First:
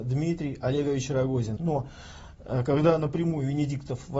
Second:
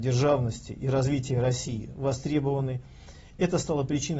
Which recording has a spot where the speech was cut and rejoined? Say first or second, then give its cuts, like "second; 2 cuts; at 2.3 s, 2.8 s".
first; 1 cut; at 1.6 s